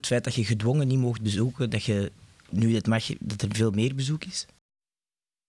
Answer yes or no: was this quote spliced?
no